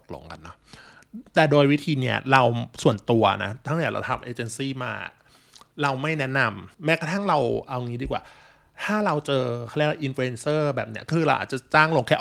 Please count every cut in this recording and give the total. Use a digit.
1